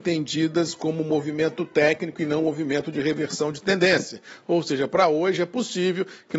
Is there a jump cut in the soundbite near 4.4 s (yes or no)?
no